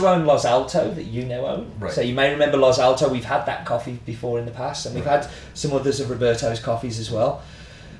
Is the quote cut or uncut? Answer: uncut